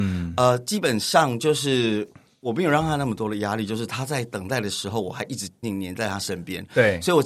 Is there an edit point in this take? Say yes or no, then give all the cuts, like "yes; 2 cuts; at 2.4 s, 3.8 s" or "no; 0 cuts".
yes; 1 cut; at 5.6 s